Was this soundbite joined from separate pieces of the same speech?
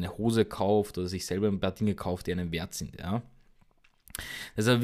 no; 0 cuts

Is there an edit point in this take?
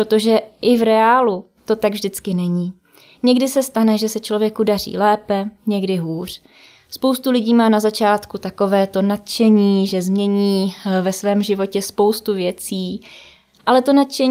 no; 0 cuts

